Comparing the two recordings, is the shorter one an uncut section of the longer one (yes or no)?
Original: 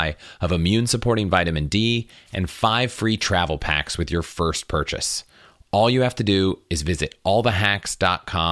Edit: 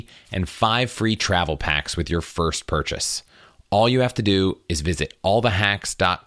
yes